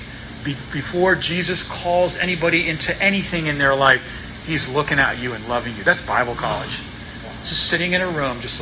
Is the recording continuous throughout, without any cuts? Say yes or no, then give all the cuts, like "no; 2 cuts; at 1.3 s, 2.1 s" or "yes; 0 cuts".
yes; 0 cuts